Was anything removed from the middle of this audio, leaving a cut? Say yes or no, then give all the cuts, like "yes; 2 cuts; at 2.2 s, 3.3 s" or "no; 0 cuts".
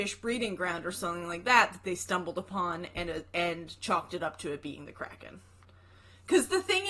no; 0 cuts